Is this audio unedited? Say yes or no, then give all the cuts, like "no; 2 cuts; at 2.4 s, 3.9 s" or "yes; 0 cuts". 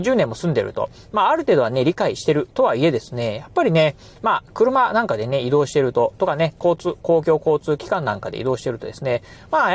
yes; 0 cuts